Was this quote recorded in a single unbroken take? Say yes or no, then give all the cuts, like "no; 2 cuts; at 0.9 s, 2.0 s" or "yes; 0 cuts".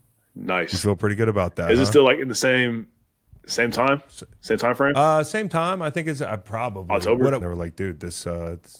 no; 1 cut; at 7.4 s